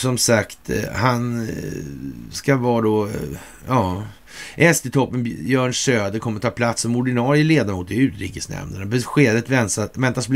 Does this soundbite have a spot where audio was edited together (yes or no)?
no